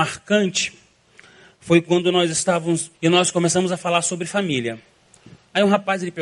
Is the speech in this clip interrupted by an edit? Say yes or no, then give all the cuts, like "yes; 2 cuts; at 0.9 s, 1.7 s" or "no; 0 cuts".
yes; 1 cut; at 2.9 s